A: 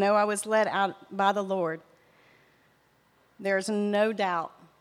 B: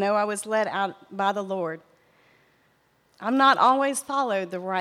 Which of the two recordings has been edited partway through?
B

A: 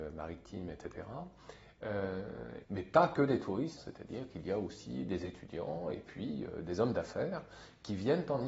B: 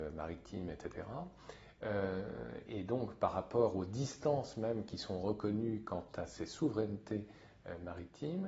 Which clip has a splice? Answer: A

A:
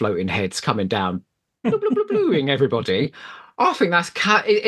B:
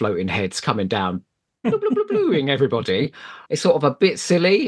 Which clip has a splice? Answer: B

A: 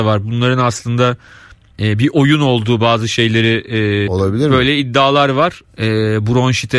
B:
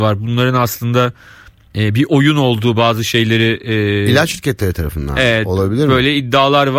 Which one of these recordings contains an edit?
A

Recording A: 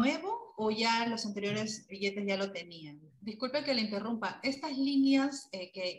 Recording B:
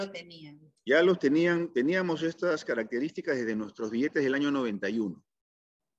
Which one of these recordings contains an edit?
A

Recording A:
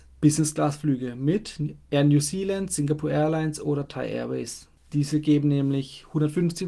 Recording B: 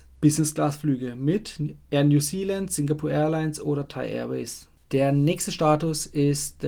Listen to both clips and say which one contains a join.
B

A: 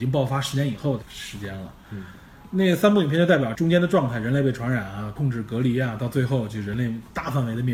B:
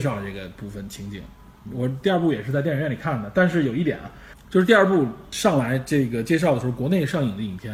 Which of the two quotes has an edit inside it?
A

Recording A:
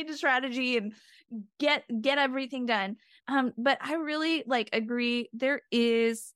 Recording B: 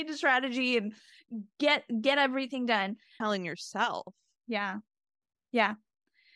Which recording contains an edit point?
B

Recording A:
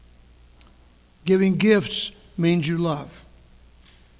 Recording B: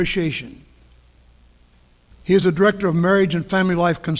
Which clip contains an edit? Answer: B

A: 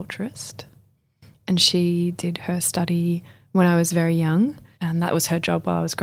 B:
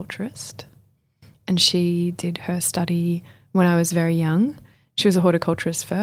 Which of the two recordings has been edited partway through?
A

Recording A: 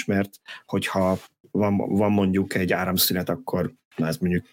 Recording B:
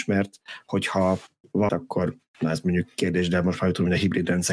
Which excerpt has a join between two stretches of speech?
B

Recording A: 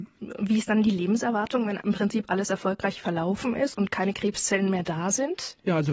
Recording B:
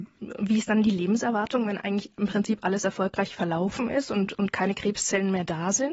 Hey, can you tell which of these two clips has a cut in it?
A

